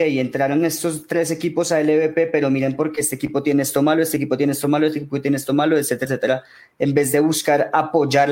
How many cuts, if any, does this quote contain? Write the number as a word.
one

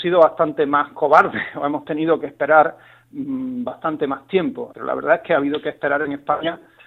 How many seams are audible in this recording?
one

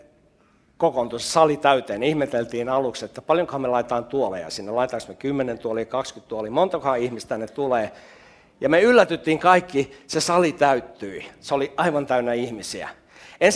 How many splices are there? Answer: zero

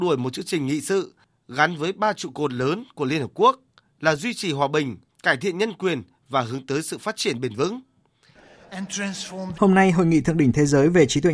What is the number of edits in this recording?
two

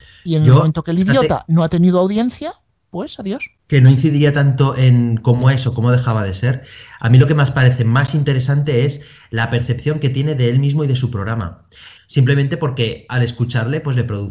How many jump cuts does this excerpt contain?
two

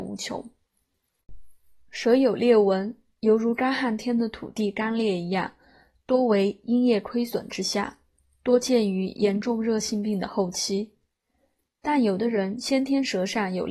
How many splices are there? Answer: zero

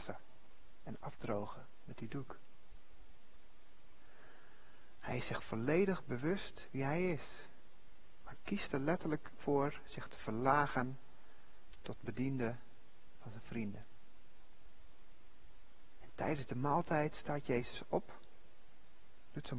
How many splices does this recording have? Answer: two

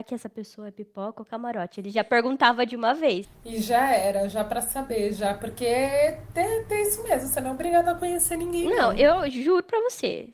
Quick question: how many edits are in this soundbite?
zero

